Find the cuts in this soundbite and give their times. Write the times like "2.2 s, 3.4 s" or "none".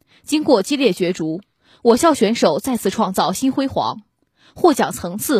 none